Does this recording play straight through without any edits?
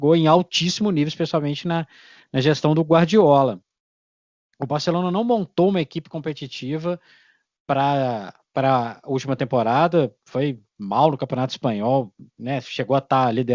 yes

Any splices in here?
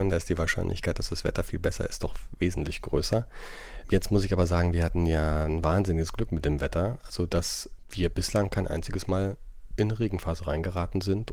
no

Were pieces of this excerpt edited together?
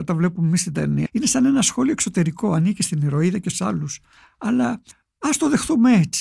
yes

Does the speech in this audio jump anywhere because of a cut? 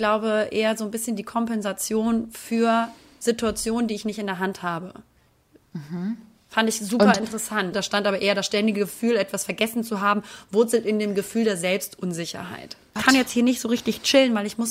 yes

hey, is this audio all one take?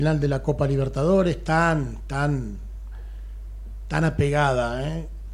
yes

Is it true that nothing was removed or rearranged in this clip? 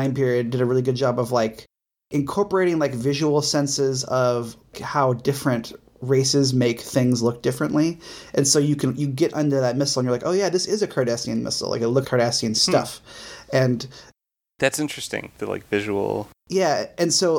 no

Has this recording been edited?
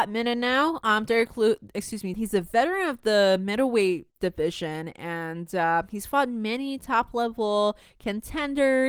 yes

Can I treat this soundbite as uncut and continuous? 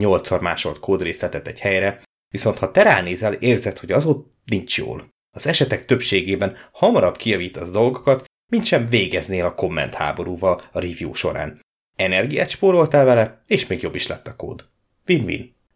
no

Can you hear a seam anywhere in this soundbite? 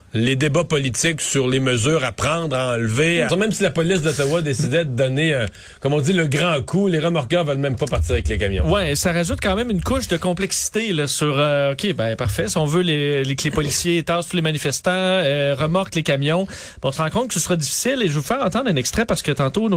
yes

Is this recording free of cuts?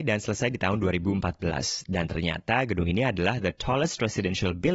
yes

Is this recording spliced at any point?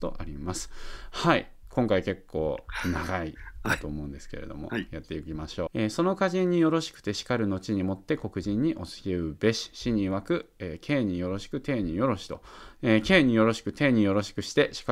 yes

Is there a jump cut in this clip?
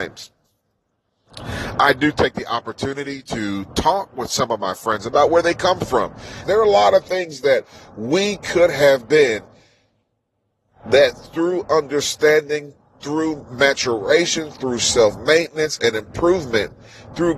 yes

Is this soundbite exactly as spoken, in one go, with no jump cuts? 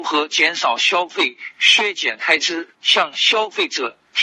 no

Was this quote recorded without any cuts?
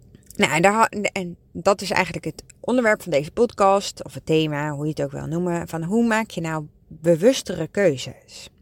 yes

